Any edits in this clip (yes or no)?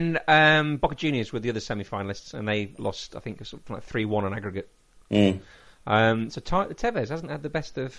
no